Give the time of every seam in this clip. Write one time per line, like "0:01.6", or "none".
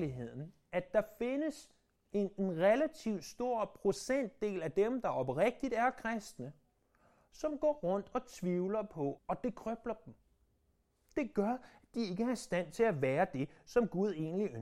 0:09.2